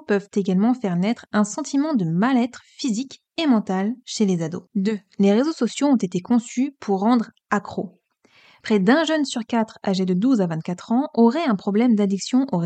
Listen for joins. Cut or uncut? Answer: cut